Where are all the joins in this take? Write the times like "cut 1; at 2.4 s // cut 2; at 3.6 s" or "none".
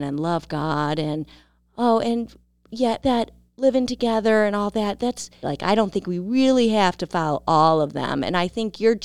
cut 1; at 3.0 s // cut 2; at 5.4 s